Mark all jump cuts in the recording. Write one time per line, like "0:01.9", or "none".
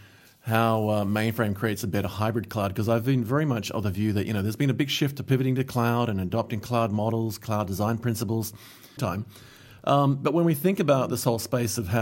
0:09.0